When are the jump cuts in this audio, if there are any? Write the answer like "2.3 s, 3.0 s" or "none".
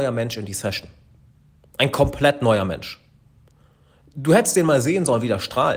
none